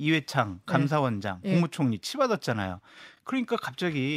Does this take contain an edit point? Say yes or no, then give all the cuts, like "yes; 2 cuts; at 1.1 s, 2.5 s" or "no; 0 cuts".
no; 0 cuts